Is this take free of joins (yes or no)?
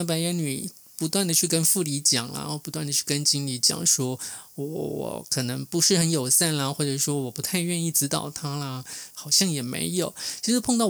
no